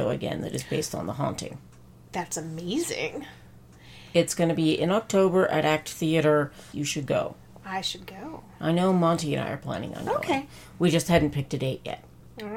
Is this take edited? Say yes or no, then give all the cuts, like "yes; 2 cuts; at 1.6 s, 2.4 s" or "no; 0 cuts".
yes; 1 cut; at 6.7 s